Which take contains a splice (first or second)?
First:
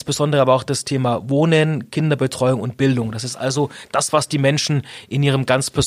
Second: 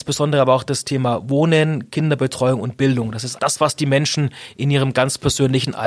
second